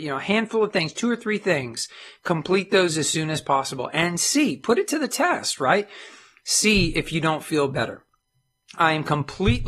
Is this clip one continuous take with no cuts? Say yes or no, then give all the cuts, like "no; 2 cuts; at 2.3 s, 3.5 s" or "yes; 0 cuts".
yes; 0 cuts